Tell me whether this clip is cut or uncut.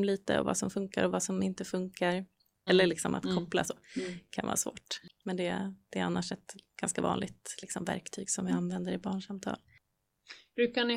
cut